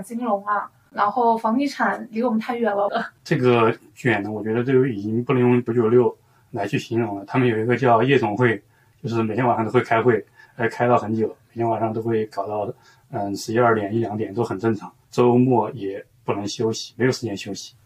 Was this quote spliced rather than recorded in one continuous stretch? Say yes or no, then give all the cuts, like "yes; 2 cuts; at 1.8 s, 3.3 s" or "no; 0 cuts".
yes; 2 cuts; at 2.9 s, 5.7 s